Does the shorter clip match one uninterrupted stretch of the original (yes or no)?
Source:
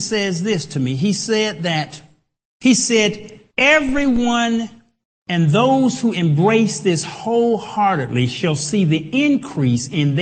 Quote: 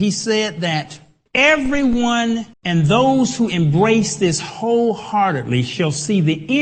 no